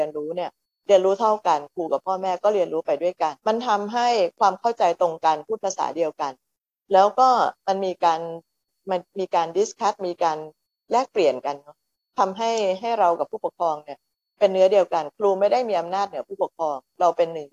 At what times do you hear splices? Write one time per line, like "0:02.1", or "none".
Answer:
0:03.4